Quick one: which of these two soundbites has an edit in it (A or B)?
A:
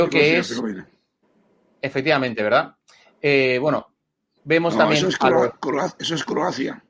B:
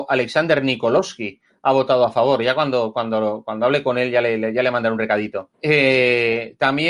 B